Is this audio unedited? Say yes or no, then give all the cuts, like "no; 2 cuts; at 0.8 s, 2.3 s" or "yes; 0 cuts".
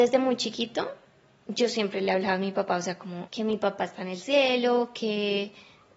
yes; 0 cuts